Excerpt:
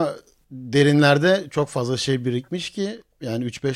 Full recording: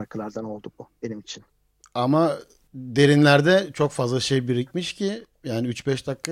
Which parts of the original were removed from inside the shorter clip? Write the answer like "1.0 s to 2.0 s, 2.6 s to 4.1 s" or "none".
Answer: none